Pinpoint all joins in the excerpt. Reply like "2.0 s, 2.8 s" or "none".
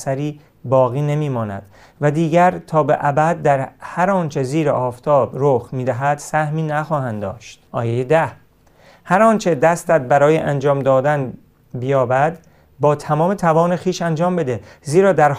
7.7 s